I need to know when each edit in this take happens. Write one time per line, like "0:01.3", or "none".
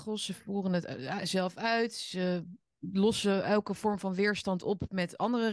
none

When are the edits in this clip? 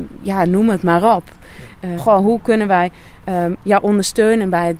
0:02.0

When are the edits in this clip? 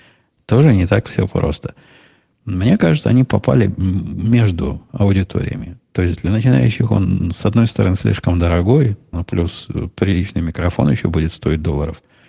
0:09.1

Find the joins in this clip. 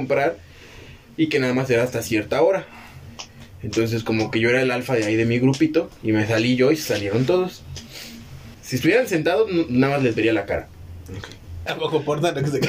0:08.5
0:11.7

